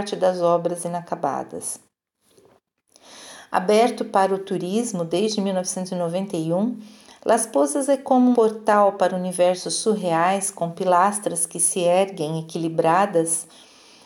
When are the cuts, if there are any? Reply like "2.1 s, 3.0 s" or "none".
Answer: 8.3 s